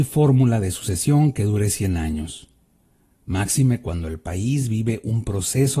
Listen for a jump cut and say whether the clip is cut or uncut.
uncut